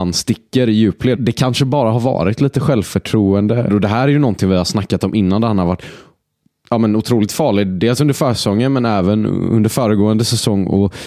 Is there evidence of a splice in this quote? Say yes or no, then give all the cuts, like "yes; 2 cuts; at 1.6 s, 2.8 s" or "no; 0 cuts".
yes; 2 cuts; at 1.2 s, 3.7 s